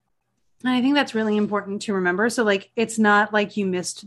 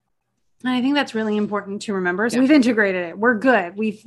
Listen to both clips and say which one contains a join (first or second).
second